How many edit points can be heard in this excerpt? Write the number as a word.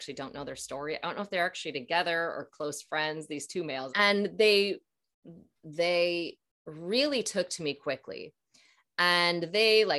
two